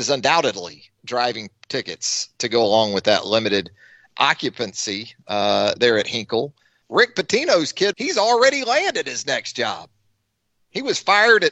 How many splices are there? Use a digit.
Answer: 2